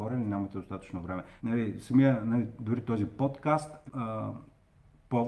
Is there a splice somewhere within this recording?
yes; 2 cuts; at 1.4 s, 3.9 s

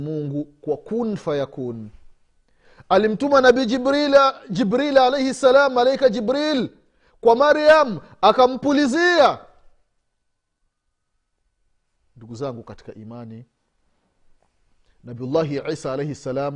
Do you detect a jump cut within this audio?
no; 0 cuts

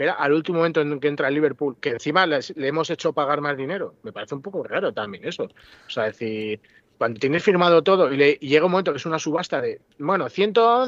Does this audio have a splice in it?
no; 0 cuts

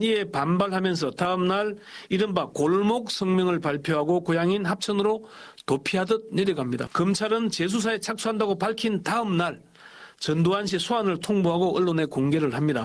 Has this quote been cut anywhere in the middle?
yes; 1 cut; at 6.9 s

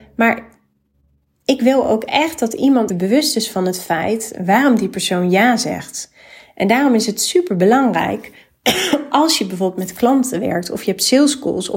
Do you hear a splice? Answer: yes; 1 cut; at 2.9 s

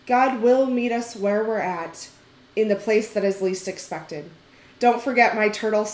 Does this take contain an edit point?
no; 0 cuts

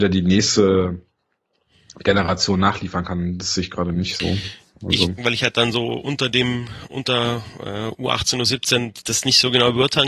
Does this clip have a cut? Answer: yes; 2 cuts; at 5.2 s, 9.0 s

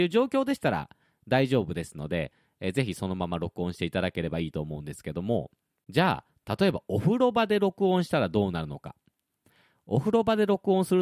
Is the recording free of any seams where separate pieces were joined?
yes; 0 cuts

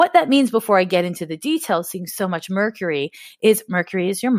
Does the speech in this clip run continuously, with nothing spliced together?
yes; 0 cuts

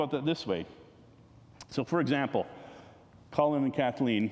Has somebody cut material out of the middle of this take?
no; 0 cuts

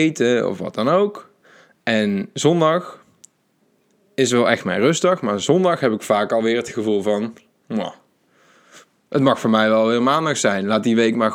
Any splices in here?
no; 0 cuts

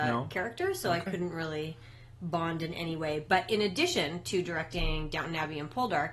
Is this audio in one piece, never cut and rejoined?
yes; 0 cuts

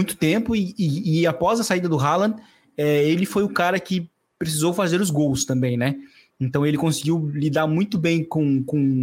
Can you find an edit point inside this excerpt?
no; 0 cuts

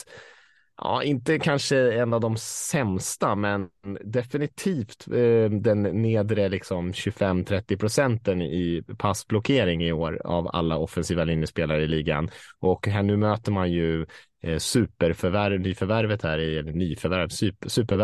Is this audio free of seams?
yes; 0 cuts

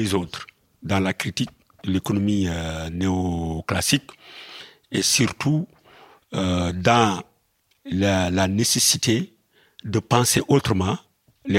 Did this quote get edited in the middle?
no; 0 cuts

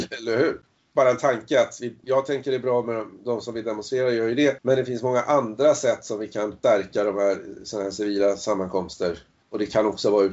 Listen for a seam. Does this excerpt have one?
no; 0 cuts

